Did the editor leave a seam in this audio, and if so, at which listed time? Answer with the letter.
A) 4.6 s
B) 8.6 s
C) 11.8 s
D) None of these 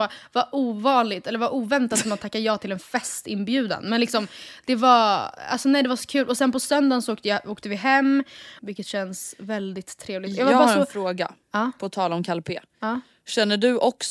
B